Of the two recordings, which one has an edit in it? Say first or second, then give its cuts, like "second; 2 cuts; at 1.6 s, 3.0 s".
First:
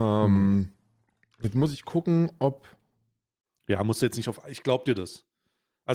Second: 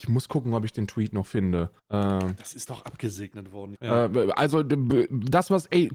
second; 2 cuts; at 1.8 s, 3.8 s